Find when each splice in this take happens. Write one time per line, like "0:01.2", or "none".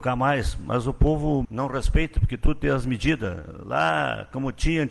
0:01.4